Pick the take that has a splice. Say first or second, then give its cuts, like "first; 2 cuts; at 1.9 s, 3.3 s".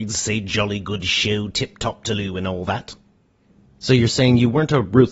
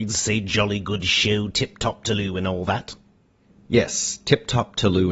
first; 1 cut; at 3.7 s